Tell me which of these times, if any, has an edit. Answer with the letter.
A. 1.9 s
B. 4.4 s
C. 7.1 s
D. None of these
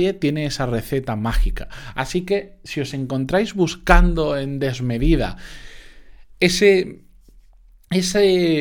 D